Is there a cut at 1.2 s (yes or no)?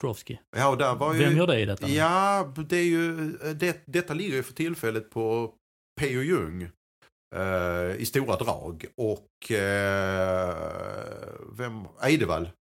no